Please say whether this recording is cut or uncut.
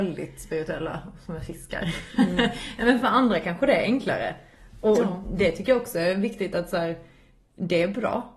uncut